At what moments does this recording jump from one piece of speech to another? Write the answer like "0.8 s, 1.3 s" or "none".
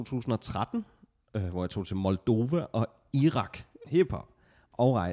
3.8 s

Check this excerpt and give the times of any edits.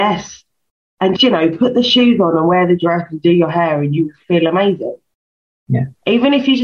1.2 s

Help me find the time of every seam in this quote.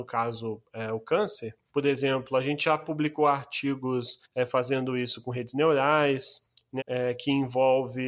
1.7 s, 6.8 s

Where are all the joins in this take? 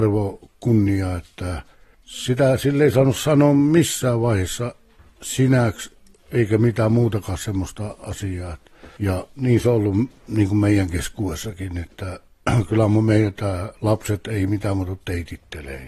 9.0 s

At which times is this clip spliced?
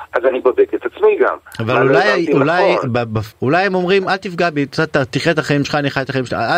3.3 s

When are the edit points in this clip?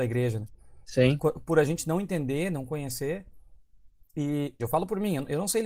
4.6 s

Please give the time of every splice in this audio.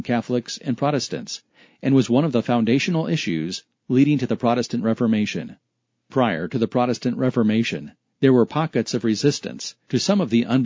6.1 s

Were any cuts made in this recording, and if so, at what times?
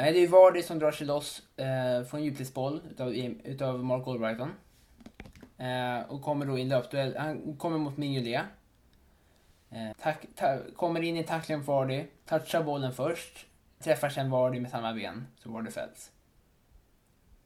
9.9 s, 13.8 s

